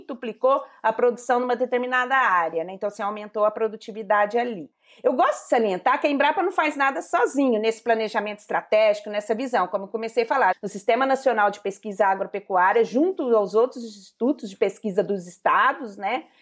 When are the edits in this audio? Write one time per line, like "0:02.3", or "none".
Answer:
0:10.5